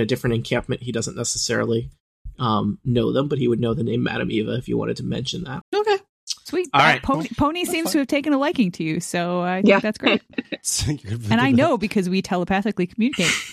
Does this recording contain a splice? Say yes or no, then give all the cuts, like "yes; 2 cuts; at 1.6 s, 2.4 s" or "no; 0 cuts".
yes; 1 cut; at 5.6 s